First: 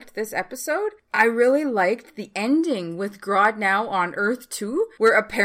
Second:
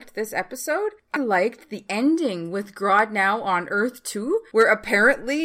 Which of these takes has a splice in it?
second; 1 cut; at 1.2 s

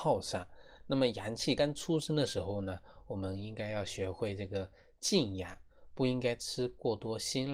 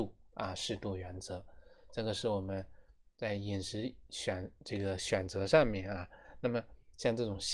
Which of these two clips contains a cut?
first; 1 cut; at 1.6 s

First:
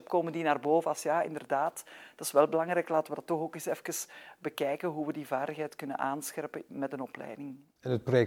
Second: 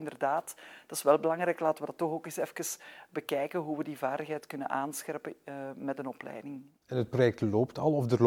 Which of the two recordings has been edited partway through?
first; 1 cut; at 6.7 s

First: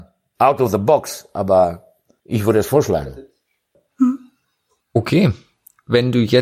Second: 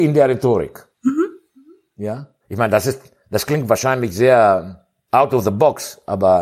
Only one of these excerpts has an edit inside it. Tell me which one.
second; 1 cut; at 2.4 s

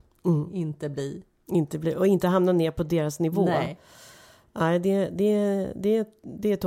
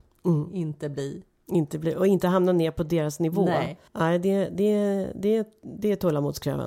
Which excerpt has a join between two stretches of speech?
second; 1 cut; at 3.9 s

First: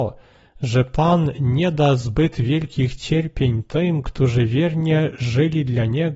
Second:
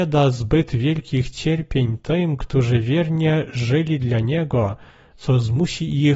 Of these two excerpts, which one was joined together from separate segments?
second; 1 cut; at 5.1 s

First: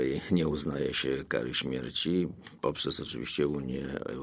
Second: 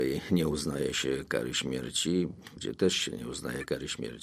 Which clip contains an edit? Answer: second; 1 cut; at 2.6 s

